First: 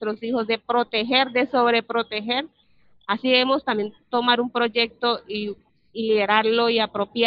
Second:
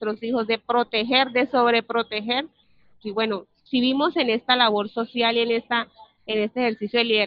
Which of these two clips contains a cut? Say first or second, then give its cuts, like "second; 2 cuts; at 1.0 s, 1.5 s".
second; 1 cut; at 3.0 s